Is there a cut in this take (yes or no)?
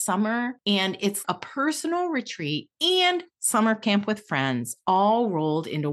yes